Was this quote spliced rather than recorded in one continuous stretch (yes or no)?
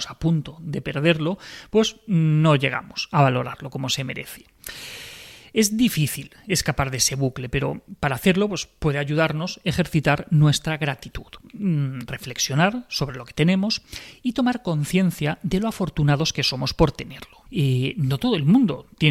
yes